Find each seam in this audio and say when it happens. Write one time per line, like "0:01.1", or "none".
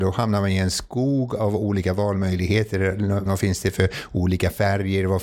0:03.3